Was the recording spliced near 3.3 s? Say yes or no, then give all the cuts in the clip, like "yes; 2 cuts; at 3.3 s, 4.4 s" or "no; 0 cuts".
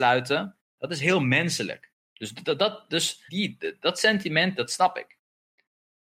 yes; 2 cuts; at 2.0 s, 3.3 s